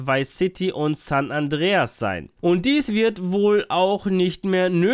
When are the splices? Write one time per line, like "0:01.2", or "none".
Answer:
0:02.4